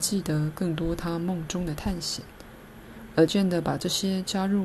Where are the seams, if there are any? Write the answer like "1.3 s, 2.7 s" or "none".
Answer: 3.3 s